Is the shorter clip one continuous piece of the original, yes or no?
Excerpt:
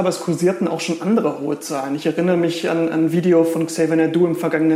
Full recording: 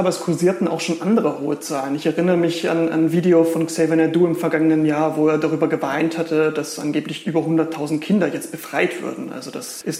yes